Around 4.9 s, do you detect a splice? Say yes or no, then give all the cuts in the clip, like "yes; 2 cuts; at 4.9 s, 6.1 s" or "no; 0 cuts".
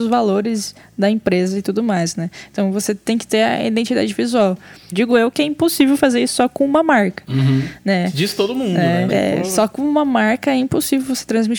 yes; 2 cuts; at 4.9 s, 9.1 s